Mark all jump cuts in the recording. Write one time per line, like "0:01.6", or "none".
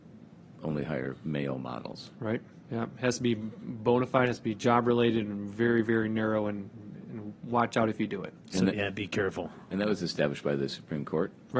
none